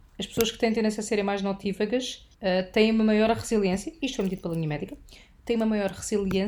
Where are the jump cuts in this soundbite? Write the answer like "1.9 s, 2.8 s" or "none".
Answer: 2.3 s